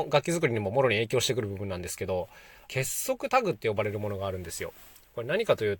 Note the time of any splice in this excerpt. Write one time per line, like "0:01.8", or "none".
0:02.7